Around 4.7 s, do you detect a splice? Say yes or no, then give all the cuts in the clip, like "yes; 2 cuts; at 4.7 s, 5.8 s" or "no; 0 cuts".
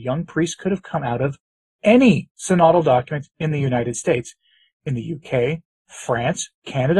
no; 0 cuts